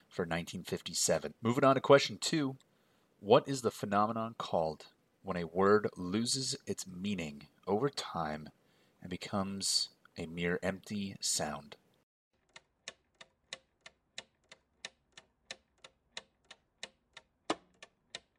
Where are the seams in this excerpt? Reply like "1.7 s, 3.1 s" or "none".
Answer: 1.3 s